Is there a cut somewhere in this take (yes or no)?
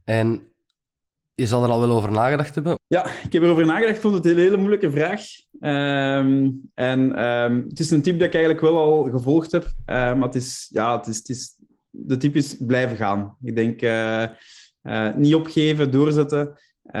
yes